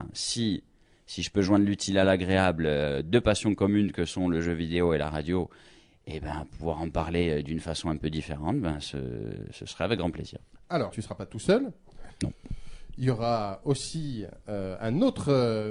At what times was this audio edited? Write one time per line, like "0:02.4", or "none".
0:10.9